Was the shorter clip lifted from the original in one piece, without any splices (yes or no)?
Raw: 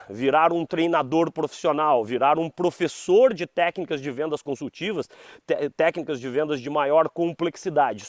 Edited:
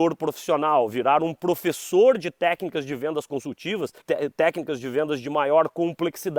no